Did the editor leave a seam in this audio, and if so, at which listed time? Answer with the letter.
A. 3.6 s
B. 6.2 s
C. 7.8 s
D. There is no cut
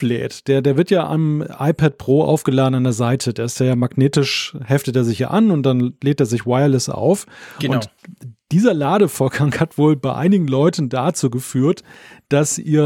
D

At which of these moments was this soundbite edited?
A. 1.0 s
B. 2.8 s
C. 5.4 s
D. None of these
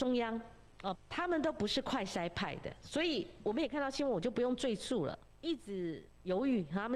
A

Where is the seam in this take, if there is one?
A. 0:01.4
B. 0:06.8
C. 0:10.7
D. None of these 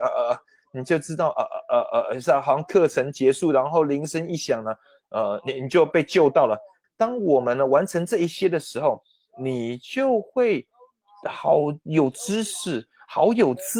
B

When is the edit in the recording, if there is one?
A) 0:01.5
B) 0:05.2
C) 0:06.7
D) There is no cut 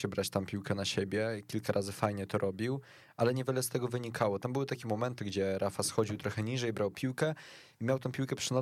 B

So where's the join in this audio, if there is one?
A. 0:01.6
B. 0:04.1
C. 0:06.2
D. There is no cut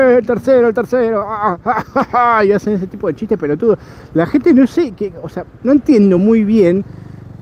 D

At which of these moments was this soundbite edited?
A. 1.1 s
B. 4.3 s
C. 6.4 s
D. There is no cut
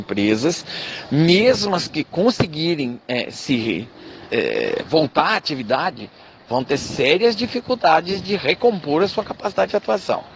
B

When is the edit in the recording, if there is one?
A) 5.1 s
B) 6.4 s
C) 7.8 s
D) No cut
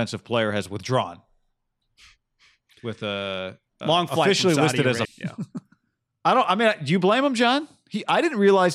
A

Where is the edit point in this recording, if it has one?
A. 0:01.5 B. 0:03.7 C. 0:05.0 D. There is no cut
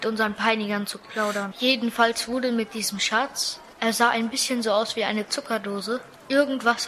A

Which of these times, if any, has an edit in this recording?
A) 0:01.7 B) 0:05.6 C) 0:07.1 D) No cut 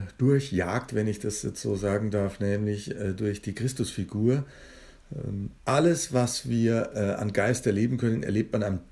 B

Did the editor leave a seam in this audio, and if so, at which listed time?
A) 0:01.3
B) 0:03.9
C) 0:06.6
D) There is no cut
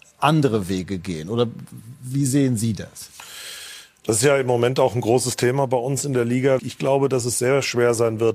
C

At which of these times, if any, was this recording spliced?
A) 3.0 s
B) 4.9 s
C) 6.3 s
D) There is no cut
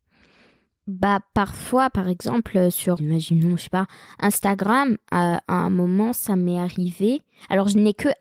A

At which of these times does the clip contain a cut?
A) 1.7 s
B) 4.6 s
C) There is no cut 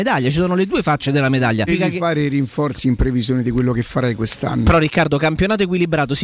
A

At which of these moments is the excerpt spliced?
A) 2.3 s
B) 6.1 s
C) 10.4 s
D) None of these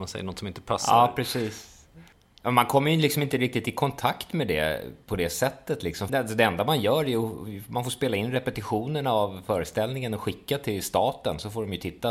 B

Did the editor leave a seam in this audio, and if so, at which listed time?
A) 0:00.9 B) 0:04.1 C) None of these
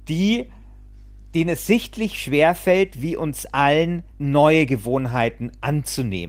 B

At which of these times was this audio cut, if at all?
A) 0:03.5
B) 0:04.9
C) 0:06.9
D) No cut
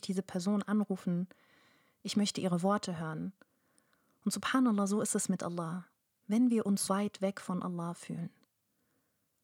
C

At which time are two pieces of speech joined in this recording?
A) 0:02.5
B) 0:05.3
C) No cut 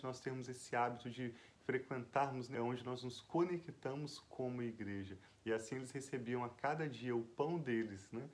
A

